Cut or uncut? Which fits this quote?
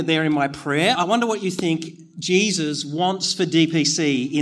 cut